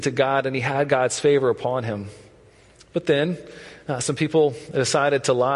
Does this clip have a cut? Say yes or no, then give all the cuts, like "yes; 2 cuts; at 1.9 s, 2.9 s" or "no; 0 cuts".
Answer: no; 0 cuts